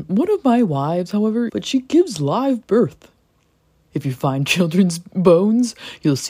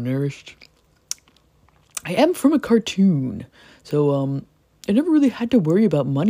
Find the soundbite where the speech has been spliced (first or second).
first